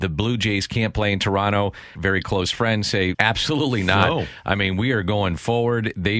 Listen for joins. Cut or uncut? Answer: cut